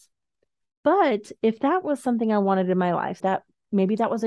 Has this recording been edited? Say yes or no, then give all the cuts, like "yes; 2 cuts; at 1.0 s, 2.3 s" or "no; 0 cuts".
yes; 1 cut; at 3.2 s